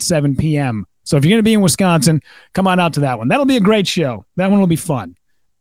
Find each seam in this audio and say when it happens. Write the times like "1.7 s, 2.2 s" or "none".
none